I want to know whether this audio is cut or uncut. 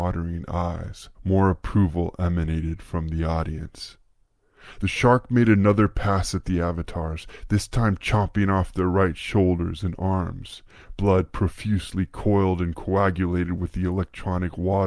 cut